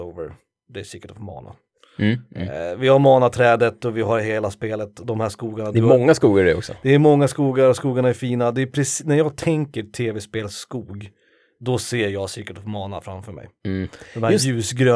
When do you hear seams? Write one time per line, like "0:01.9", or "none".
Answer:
none